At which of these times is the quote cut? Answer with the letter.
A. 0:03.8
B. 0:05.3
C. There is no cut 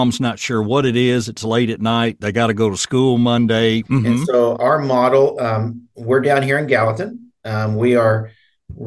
A